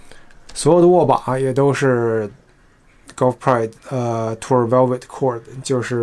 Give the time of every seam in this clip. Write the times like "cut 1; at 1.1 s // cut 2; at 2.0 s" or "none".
cut 1; at 3.8 s